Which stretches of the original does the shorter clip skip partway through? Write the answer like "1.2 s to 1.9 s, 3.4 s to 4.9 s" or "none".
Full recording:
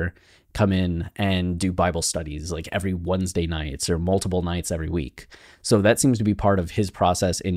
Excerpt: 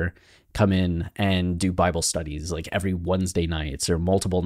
none

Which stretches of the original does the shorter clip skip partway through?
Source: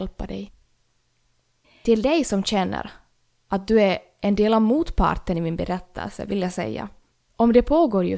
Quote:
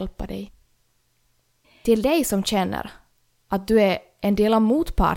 none

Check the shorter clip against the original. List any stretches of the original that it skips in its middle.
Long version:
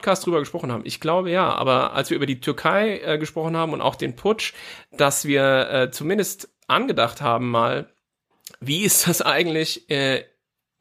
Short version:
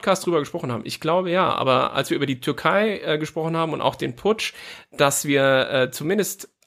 none

